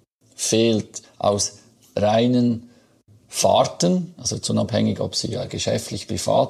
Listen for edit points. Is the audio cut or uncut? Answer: cut